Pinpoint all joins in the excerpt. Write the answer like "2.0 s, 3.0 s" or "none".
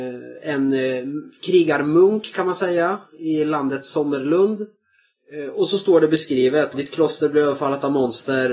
6.7 s